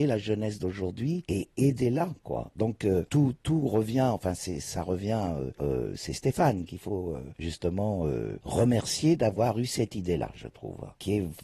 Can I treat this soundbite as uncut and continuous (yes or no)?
yes